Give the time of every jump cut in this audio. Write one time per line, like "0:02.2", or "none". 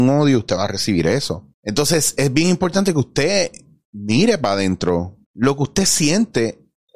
0:01.5
0:05.2